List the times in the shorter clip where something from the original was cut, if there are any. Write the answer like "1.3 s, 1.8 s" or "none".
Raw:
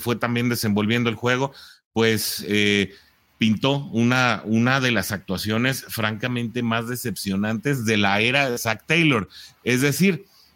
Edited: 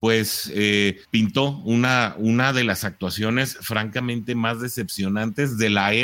1.0 s